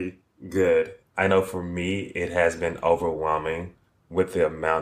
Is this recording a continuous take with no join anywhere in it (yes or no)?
no